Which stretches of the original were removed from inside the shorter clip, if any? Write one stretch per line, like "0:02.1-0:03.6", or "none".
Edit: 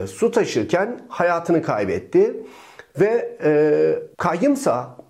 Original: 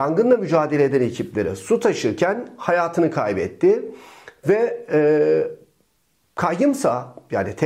0:05.6-0:06.3